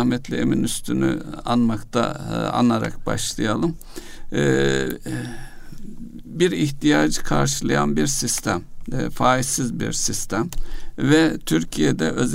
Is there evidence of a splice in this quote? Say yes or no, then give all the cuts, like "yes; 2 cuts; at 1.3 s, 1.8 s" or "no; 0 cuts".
no; 0 cuts